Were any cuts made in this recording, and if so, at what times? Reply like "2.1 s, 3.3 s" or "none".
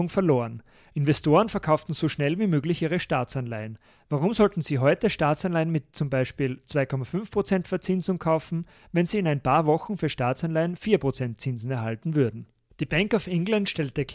12.7 s